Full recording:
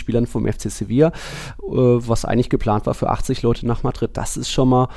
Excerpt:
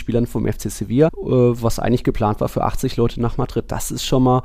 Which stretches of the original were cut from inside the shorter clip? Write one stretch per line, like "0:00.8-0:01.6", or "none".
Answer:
0:01.1-0:01.5